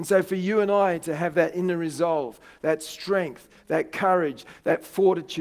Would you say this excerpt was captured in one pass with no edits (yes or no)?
yes